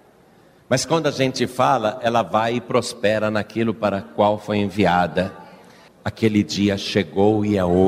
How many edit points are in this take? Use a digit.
1